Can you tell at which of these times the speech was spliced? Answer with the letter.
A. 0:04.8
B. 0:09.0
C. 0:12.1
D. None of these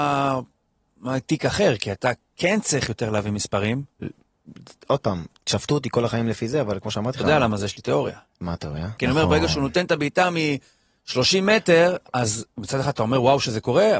B